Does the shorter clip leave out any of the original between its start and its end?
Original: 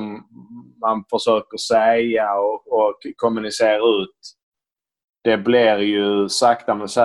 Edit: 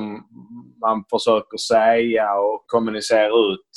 yes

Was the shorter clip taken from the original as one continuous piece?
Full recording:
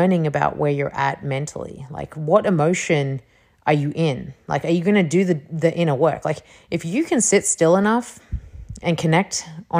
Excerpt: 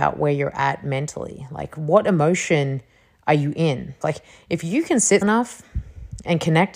no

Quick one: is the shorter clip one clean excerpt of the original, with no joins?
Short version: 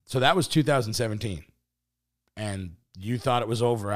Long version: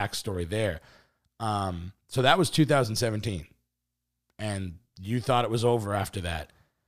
yes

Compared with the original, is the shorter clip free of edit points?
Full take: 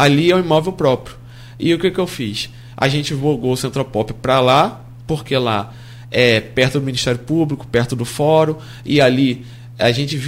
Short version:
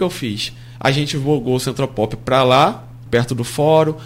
no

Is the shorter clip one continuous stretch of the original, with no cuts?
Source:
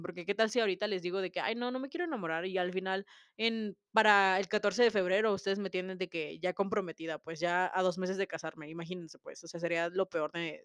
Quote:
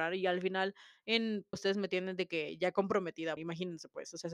no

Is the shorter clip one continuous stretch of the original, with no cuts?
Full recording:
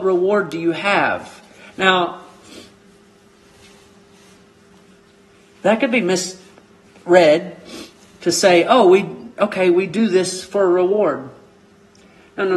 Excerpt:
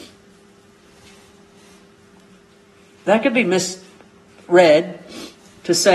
yes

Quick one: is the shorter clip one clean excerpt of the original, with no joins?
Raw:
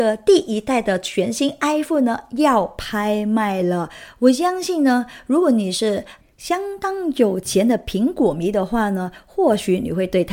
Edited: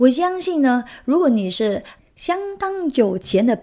yes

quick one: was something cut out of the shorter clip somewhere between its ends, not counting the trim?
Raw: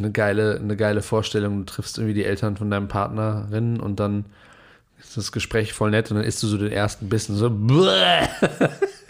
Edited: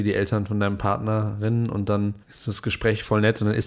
yes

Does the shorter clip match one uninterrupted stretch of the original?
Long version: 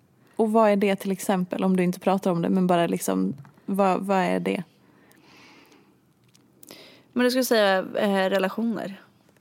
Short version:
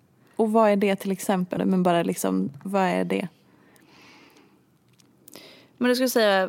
no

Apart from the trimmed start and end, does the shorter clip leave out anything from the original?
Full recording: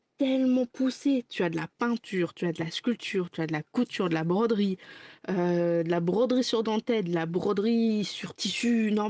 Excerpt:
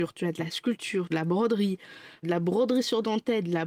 yes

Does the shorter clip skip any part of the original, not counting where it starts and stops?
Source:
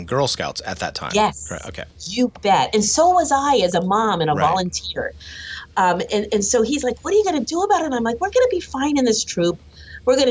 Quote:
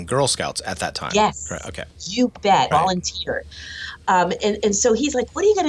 yes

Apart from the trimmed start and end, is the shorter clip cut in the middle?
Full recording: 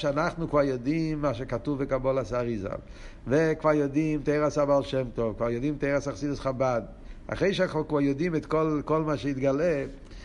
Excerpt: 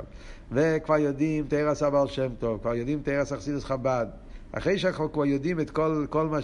no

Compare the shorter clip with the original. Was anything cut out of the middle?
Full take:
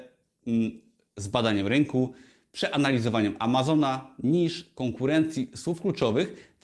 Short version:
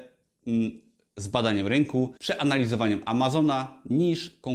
yes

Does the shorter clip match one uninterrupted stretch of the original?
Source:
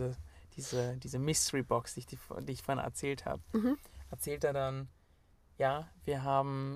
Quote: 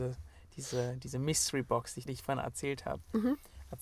no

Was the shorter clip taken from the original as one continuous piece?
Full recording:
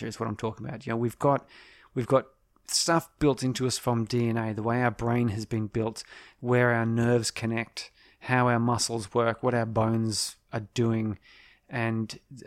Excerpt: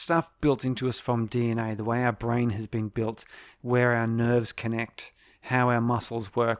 yes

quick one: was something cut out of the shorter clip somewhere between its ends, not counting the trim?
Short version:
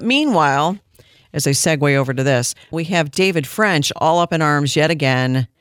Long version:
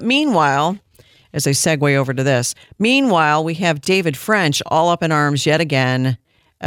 yes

